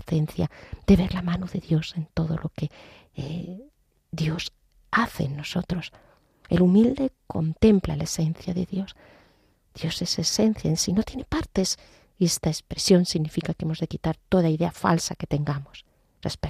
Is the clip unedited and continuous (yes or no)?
yes